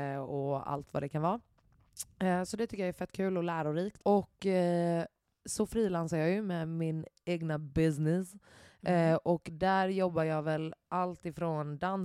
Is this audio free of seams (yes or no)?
no